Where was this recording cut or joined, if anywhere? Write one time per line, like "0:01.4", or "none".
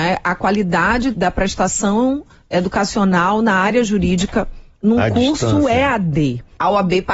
0:01.1